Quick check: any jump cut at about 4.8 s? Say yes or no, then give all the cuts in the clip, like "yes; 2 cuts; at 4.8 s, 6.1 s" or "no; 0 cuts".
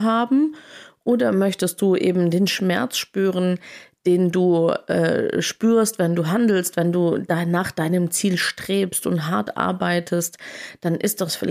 no; 0 cuts